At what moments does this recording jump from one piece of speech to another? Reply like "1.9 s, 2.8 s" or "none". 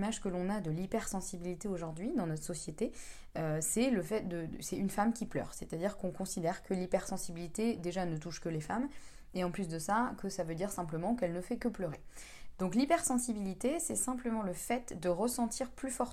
12.5 s